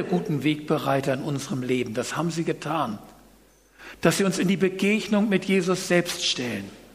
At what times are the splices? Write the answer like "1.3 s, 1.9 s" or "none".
none